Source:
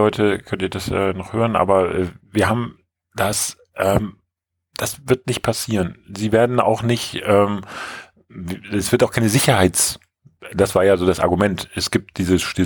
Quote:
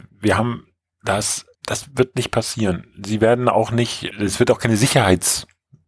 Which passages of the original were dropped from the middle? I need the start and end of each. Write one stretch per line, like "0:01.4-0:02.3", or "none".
0:03.7-0:04.7
0:07.2-0:08.6